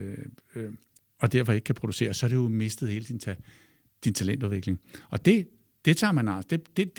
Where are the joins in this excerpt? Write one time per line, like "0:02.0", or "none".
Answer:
0:01.0